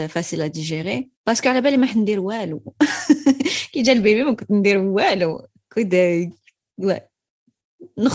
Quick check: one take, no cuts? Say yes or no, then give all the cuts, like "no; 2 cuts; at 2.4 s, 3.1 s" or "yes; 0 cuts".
no; 1 cut; at 1.2 s